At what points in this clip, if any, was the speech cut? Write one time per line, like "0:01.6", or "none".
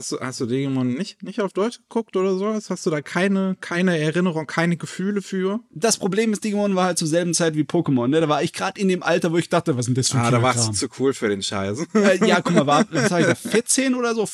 none